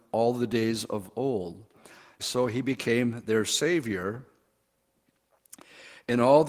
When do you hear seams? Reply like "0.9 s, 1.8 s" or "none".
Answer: 2.2 s